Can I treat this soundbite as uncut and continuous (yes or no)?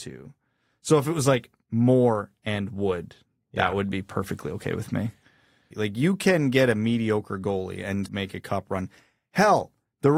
no